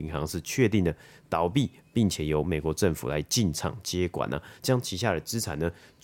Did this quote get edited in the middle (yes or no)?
no